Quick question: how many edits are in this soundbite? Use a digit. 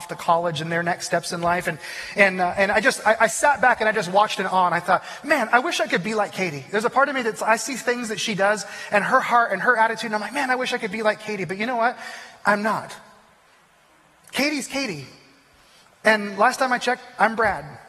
0